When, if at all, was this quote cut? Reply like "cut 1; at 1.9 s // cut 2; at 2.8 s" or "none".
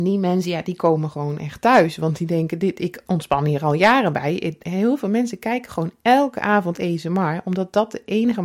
none